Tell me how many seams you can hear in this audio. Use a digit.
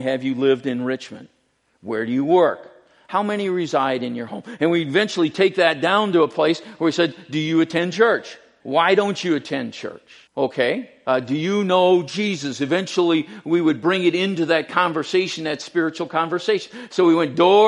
2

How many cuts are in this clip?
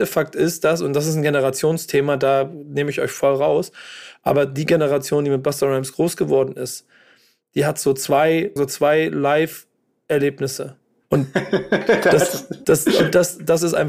3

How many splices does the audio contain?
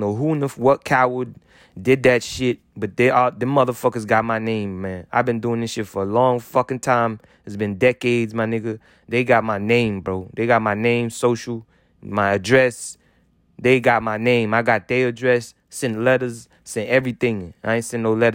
0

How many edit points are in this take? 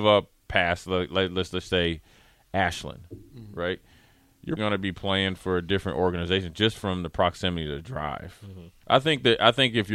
2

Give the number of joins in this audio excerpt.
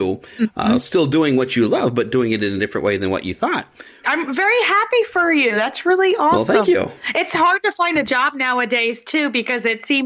1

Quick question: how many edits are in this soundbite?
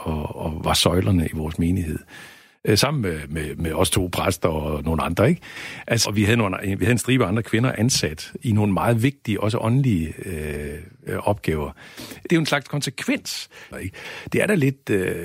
3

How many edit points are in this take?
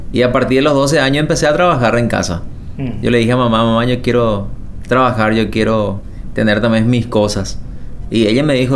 0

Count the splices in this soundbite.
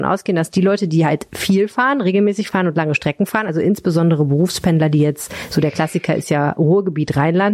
0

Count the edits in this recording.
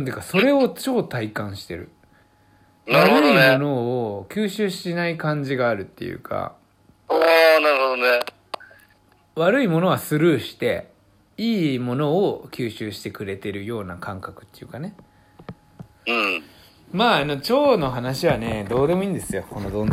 0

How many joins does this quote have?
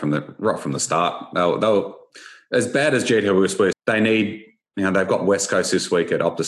1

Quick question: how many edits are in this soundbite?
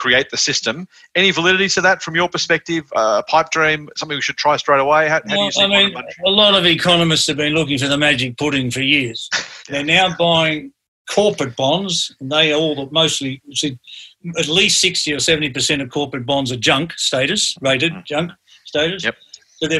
1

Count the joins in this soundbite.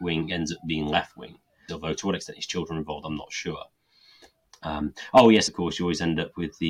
2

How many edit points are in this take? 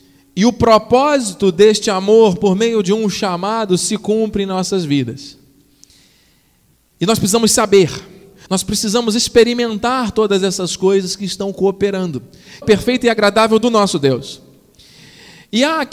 2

